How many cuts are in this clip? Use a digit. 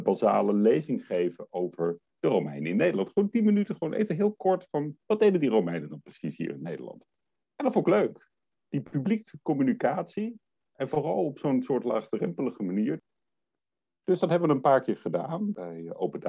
0